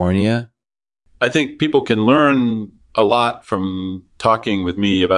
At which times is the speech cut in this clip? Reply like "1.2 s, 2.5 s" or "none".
none